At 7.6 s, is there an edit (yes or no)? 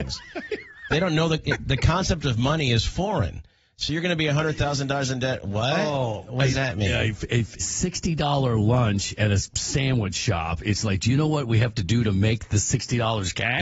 yes